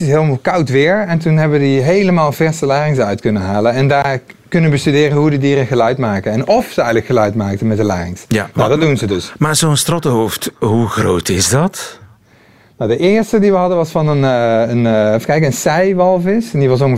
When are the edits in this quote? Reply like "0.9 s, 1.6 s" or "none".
none